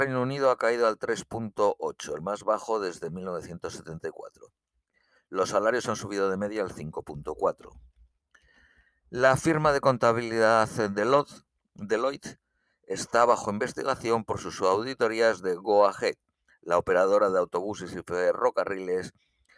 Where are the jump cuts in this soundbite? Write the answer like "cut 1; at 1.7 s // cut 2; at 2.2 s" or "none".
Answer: none